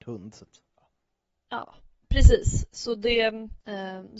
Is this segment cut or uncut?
cut